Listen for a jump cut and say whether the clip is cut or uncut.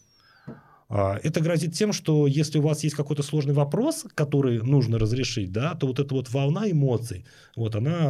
uncut